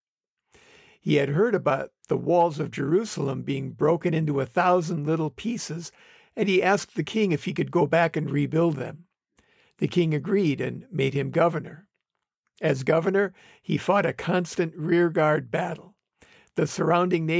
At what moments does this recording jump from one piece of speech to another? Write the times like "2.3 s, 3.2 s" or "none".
none

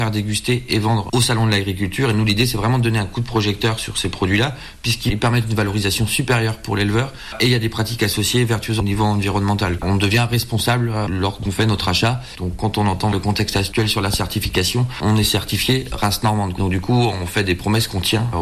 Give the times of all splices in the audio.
none

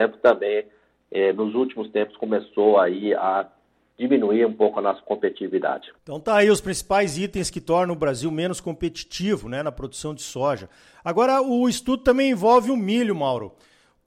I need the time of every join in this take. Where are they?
6.0 s

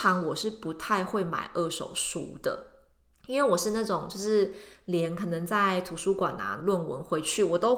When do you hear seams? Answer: 6.6 s

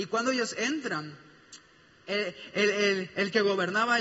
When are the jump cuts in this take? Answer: none

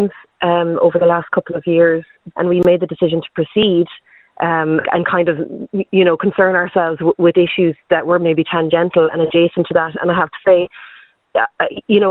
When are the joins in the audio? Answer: 2.3 s, 4.8 s

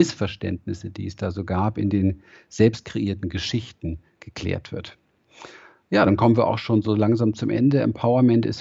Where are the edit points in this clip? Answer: none

